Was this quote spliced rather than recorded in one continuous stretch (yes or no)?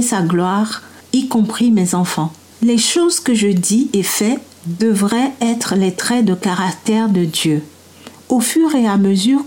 yes